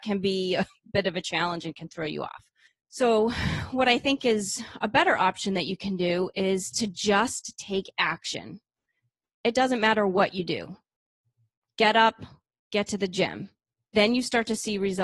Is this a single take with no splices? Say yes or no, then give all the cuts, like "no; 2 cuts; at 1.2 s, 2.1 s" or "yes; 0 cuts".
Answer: yes; 0 cuts